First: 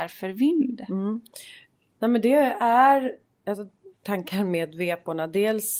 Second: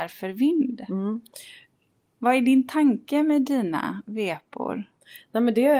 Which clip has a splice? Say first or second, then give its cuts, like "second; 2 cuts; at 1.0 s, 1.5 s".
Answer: first; 2 cuts; at 2.0 s, 3.9 s